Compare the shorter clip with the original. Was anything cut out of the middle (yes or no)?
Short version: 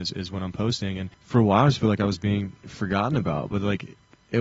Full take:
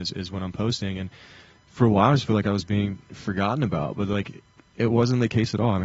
yes